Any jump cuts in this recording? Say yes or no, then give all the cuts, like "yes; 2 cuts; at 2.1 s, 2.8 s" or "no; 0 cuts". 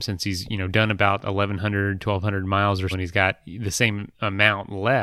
yes; 1 cut; at 2.9 s